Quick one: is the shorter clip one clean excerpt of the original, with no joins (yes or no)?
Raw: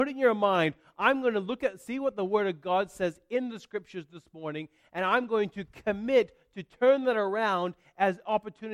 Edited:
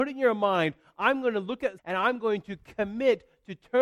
no